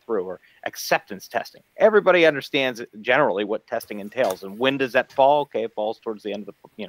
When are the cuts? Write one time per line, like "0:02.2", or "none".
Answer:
none